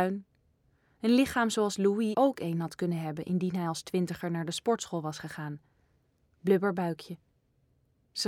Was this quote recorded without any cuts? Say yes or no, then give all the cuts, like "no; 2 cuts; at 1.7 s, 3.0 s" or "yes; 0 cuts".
no; 2 cuts; at 2.1 s, 6.3 s